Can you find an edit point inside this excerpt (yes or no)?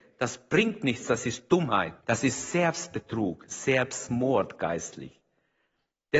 yes